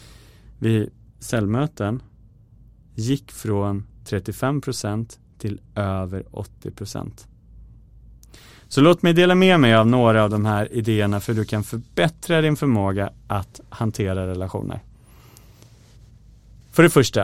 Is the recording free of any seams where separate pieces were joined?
yes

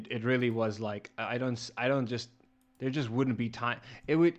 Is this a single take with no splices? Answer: yes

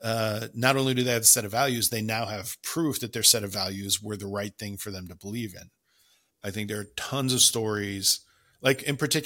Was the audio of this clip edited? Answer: yes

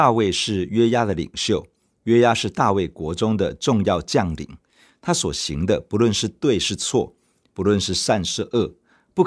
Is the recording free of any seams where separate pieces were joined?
yes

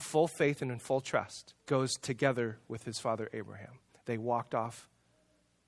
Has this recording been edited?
yes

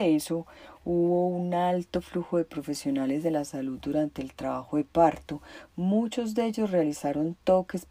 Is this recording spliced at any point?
no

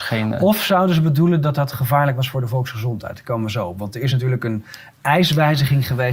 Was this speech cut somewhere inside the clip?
no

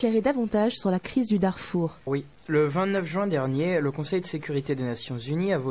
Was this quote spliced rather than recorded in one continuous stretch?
yes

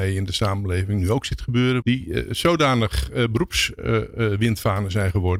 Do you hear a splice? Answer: yes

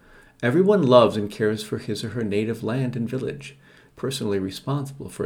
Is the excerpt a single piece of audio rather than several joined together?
no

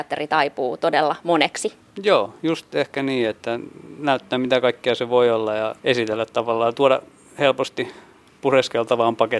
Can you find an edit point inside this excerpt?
yes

